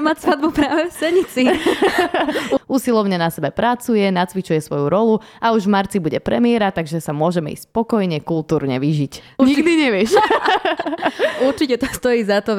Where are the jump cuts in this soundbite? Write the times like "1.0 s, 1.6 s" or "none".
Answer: 2.6 s, 9.4 s